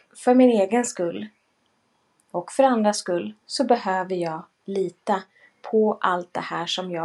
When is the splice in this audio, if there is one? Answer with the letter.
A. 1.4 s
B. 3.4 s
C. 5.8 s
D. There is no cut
B